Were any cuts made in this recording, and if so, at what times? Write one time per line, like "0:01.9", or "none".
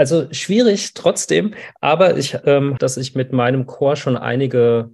0:02.8